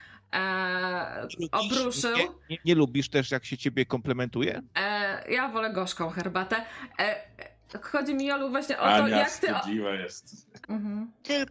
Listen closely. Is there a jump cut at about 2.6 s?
yes; 2 cuts; at 2.6 s, 10.6 s

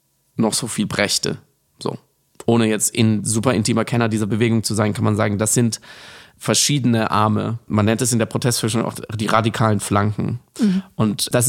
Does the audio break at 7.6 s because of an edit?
no; 0 cuts

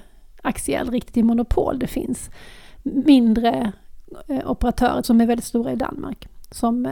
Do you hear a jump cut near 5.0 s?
yes; 1 cut; at 5.0 s

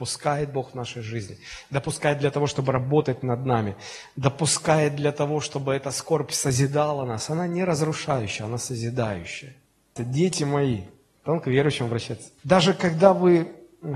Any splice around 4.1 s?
no; 2 cuts; at 10.0 s, 12.4 s

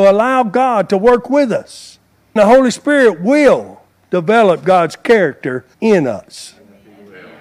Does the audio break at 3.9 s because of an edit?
no; 2 cuts; at 2.4 s, 5.7 s

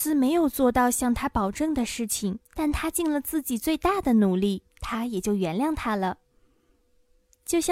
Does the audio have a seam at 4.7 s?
yes; 2 cuts; at 2.5 s, 4.7 s

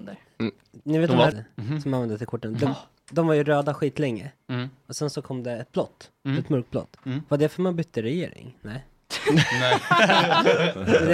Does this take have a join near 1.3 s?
yes; 1 cut; at 1.3 s

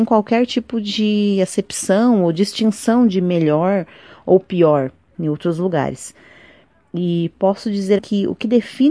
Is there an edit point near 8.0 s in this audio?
yes; 2 cuts; at 5.1 s, 8.0 s

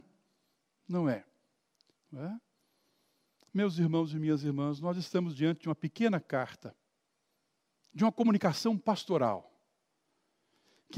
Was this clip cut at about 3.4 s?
no; 1 cut; at 1.9 s

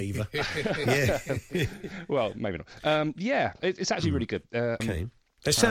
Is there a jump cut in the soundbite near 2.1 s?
no; 2 cuts; at 3.6 s, 4.8 s

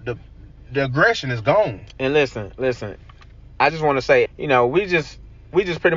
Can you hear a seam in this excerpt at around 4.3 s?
yes; 1 cut; at 4.3 s

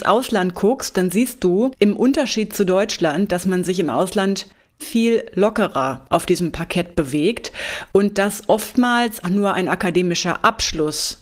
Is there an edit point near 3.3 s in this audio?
no; 2 cuts; at 4.8 s, 9.2 s

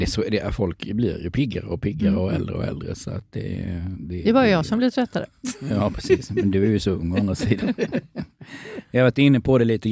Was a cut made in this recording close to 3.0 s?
no; 0 cuts

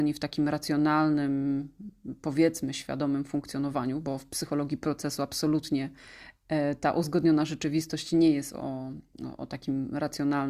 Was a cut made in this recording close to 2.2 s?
no; 0 cuts

